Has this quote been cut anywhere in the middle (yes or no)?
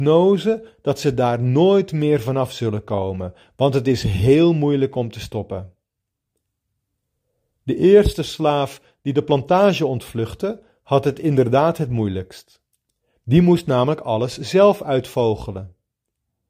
no